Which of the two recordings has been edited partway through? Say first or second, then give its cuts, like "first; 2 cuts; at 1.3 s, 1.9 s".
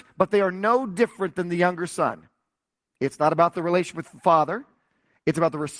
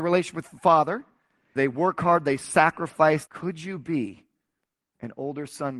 second; 2 cuts; at 1.6 s, 3.3 s